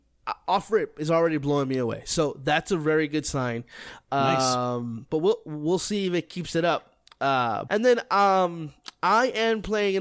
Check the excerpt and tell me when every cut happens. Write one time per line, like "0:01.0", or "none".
0:07.7